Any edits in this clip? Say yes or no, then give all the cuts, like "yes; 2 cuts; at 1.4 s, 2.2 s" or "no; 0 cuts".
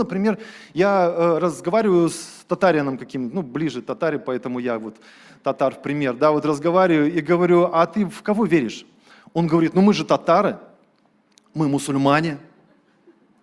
no; 0 cuts